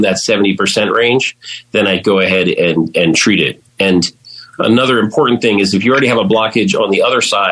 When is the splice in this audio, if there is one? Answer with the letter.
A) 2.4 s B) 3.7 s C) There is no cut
C